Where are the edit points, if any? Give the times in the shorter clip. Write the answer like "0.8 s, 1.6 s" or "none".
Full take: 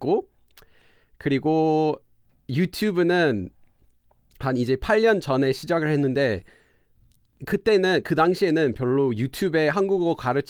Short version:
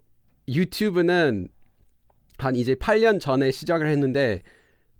none